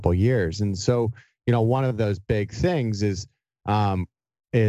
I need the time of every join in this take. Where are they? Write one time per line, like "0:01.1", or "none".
none